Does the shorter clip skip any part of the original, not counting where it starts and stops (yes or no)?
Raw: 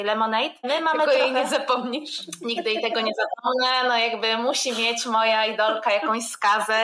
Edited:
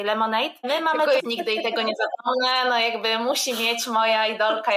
yes